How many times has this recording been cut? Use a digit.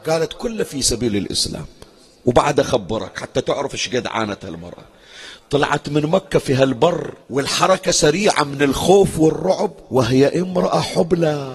2